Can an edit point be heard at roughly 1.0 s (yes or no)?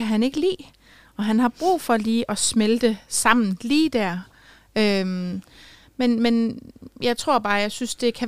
no